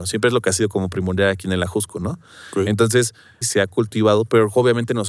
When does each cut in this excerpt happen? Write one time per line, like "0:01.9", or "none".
0:03.4

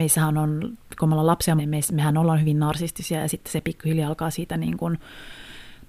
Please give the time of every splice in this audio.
0:01.6

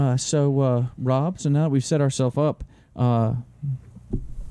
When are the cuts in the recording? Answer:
none

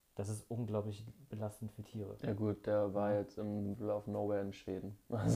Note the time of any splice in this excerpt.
none

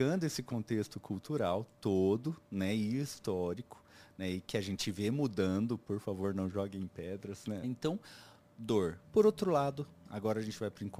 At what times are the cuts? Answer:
0:07.6
0:09.0

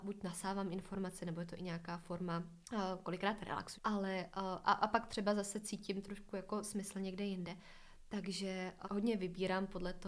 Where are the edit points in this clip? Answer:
0:02.6
0:03.7
0:08.8

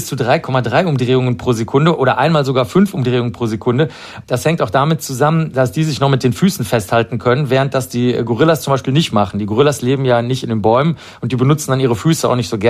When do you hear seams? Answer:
0:04.2

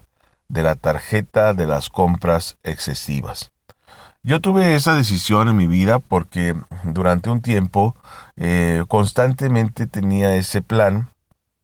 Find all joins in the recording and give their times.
none

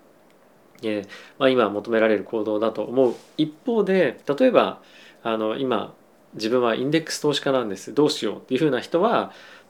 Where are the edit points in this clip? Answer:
0:04.2

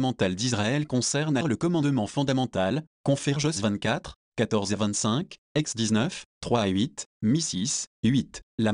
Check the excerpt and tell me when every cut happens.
0:01.4

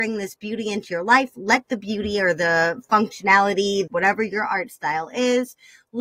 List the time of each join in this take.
0:03.9

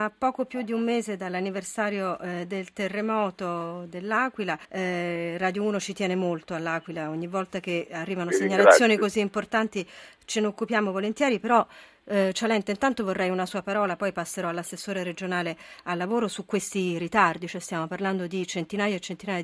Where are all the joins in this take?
0:04.6

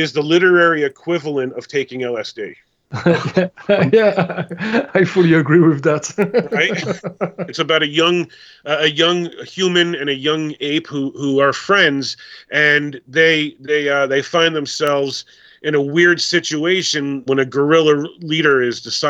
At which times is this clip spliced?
0:07.5
0:17.3

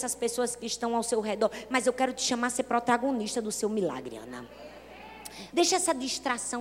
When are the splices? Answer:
0:05.5

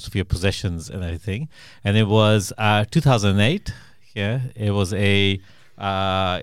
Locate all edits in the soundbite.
none

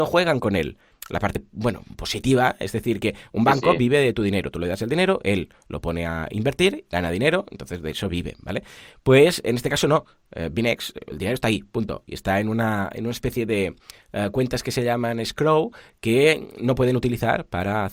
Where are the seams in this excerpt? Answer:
none

